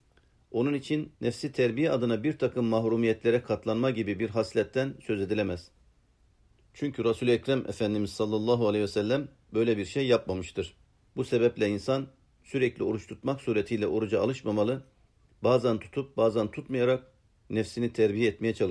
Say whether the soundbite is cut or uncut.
cut